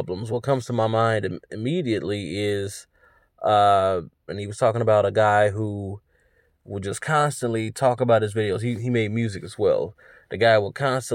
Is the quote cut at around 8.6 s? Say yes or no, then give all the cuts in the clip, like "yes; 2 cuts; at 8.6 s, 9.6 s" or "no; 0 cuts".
no; 1 cut; at 4.3 s